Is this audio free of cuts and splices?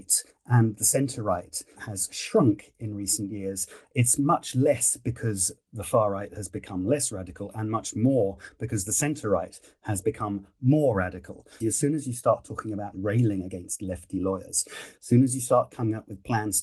no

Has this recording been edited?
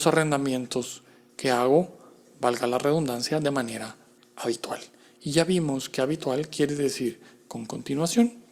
no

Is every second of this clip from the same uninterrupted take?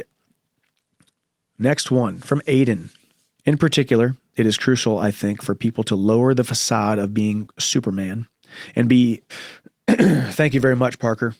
no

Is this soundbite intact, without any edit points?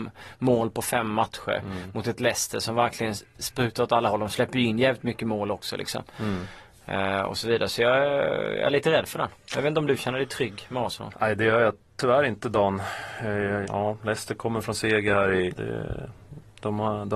no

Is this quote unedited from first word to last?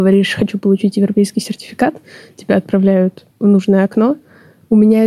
no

